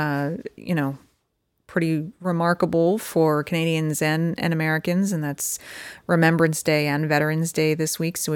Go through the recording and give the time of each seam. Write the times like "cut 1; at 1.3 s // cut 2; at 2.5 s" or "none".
none